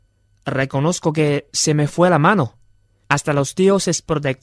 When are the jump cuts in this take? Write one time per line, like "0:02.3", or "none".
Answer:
0:03.0